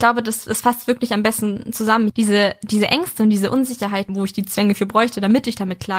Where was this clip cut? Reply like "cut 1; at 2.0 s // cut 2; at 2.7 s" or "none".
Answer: cut 1; at 2.1 s // cut 2; at 4.1 s